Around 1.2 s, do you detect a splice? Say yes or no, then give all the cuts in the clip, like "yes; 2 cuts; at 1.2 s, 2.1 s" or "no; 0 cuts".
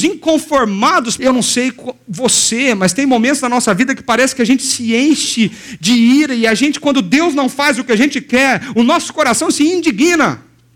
yes; 1 cut; at 1.2 s